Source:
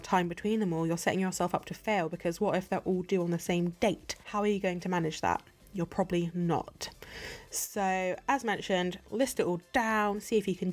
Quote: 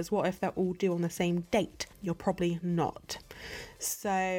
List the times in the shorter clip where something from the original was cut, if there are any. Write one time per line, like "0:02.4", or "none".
0:01.9